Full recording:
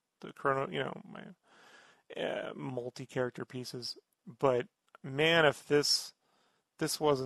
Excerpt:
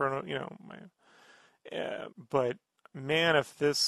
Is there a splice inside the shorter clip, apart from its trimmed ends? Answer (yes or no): yes